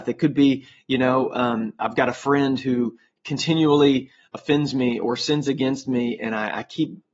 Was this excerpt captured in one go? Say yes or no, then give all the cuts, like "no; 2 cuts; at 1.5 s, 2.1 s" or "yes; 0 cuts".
yes; 0 cuts